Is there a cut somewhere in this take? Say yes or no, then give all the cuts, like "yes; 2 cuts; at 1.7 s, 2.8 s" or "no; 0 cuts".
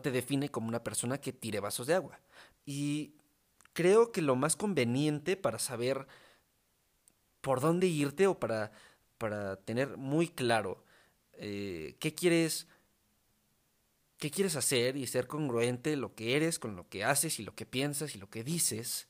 yes; 1 cut; at 2.6 s